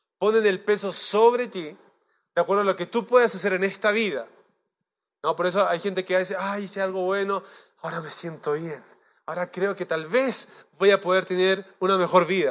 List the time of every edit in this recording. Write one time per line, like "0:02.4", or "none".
none